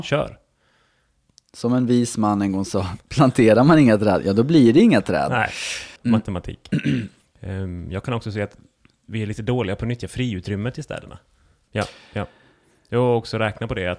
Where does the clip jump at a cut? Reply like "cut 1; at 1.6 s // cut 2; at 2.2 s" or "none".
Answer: cut 1; at 6.0 s // cut 2; at 7.2 s // cut 3; at 11.7 s

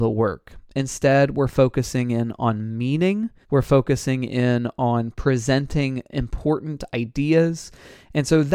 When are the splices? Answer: cut 1; at 3.4 s

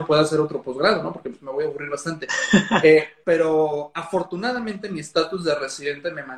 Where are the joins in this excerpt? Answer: cut 1; at 3.2 s

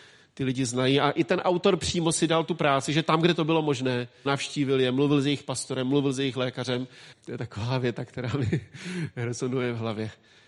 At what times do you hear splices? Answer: cut 1; at 4.3 s // cut 2; at 7.1 s

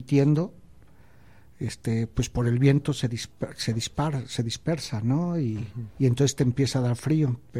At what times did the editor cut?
cut 1; at 5.9 s

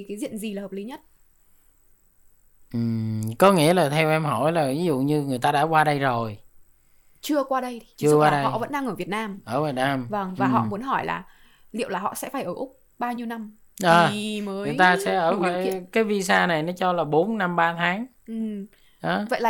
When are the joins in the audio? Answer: none

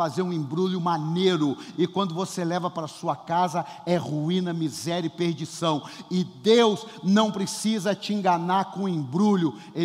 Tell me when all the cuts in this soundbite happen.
none

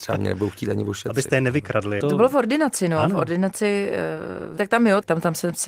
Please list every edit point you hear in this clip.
cut 1; at 2.0 s // cut 2; at 4.6 s

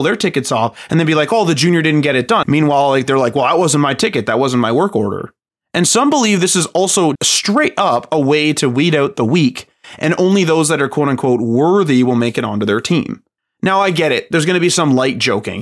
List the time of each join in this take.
cut 1; at 2.4 s // cut 2; at 7.2 s

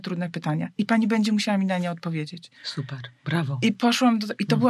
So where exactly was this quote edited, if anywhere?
cut 1; at 2.6 s

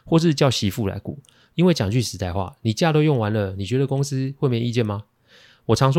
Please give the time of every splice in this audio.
cut 1; at 1.5 s

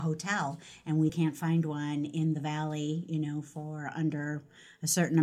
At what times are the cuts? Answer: cut 1; at 1.1 s

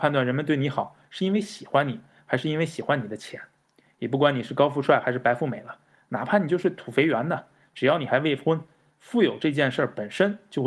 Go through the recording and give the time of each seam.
cut 1; at 3.8 s

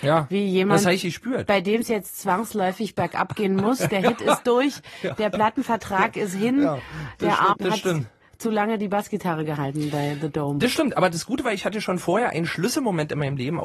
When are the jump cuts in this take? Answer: cut 1; at 7.5 s

